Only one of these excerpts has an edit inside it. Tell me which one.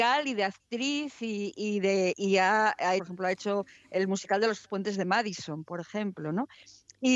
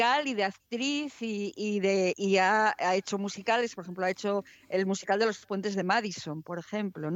first; 1 cut; at 3.0 s

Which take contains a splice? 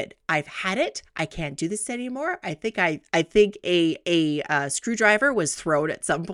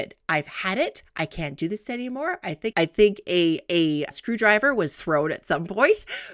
second; 2 cuts; at 2.7 s, 4.1 s

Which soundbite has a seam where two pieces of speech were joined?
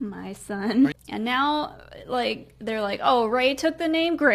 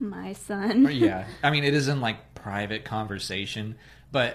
first; 1 cut; at 0.9 s

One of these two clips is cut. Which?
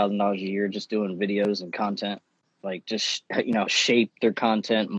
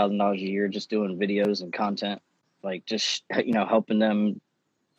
first; 1 cut; at 3.7 s

